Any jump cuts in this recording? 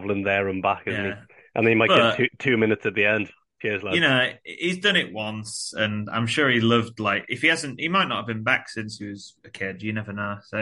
no; 0 cuts

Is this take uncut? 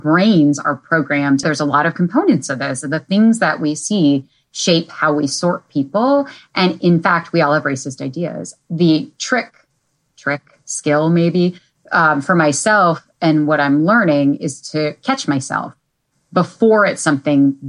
no; 1 cut; at 1.4 s

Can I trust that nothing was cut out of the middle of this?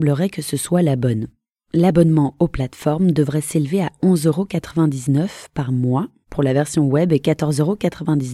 yes; 0 cuts

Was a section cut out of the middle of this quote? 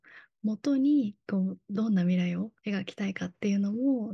yes; 1 cut; at 2.6 s

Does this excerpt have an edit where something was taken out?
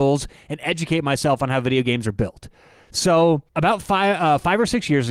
yes; 1 cut; at 3.5 s

